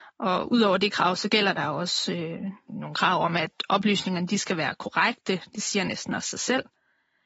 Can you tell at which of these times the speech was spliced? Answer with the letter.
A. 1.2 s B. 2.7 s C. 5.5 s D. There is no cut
B